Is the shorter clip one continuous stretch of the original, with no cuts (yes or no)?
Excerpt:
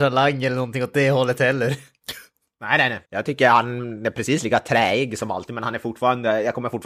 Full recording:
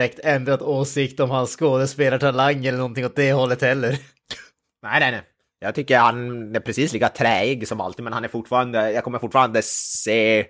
no